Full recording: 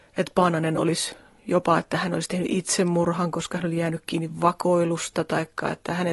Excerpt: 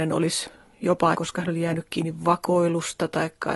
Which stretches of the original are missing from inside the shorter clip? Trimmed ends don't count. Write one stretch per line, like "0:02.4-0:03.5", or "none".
0:01.8-0:03.3